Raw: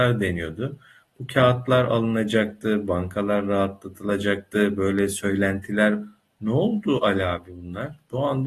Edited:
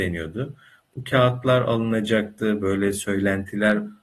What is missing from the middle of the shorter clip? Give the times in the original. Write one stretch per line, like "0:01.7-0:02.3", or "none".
0:02.8-0:04.8